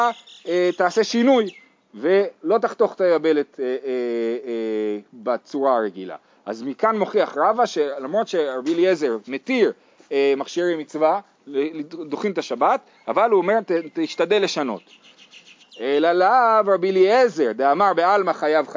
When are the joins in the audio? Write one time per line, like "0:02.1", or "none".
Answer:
0:15.6